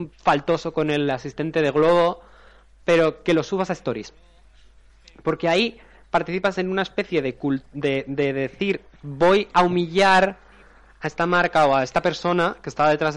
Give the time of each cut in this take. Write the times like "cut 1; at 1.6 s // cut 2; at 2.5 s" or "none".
none